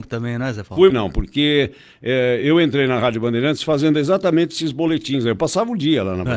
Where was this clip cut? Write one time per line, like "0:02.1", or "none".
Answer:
0:00.9